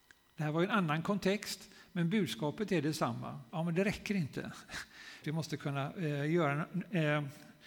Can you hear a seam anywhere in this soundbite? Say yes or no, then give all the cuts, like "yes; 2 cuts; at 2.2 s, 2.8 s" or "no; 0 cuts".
yes; 2 cuts; at 3.5 s, 5.2 s